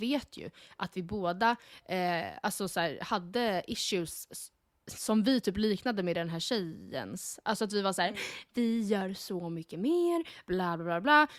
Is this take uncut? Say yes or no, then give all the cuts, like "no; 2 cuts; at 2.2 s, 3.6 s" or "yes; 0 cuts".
yes; 0 cuts